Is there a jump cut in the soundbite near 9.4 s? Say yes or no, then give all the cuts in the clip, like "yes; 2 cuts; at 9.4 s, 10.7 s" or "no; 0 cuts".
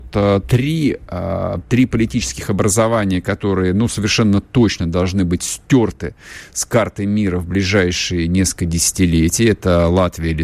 no; 1 cut; at 1.6 s